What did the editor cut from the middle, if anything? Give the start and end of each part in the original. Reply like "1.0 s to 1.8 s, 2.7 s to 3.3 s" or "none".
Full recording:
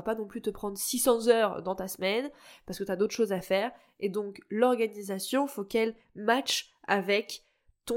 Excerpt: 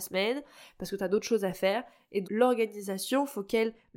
4.1 s to 4.5 s